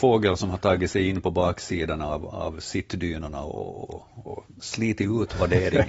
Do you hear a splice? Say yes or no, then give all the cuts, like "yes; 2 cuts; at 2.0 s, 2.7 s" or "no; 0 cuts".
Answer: no; 0 cuts